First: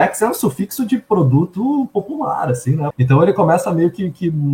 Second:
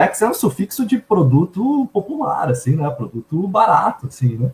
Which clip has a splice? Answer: first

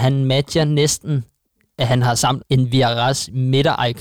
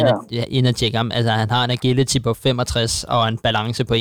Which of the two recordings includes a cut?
first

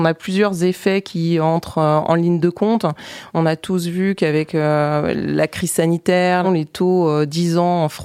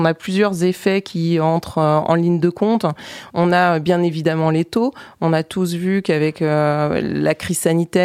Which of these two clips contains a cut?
first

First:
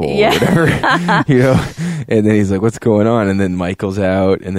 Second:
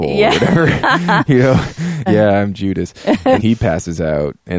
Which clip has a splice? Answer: second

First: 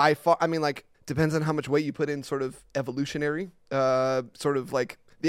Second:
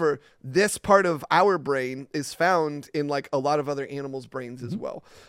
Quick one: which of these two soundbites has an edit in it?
first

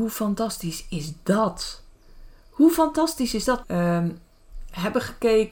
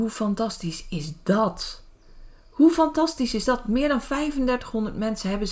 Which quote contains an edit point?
first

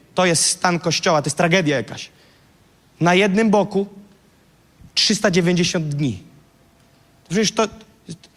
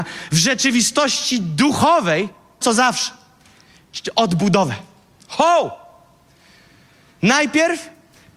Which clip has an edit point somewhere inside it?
second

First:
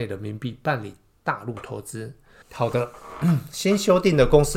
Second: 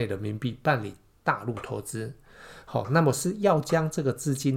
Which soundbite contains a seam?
first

